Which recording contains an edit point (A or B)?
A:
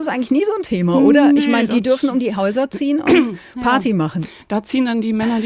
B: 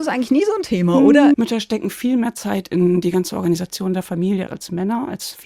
B